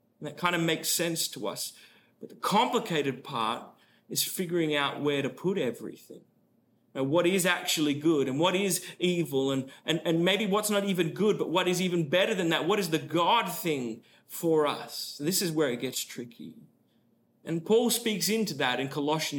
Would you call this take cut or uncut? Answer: uncut